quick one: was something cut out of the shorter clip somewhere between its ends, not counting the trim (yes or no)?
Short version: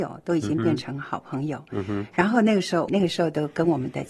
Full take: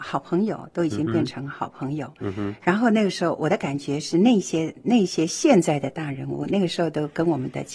yes